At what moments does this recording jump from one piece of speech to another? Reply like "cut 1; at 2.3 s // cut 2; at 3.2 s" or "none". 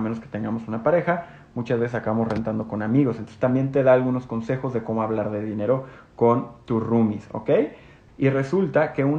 cut 1; at 8.1 s